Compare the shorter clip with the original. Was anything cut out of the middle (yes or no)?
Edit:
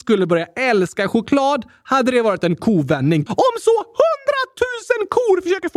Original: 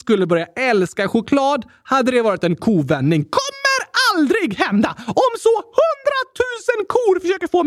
yes